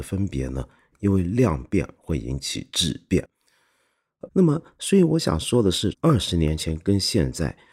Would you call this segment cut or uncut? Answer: cut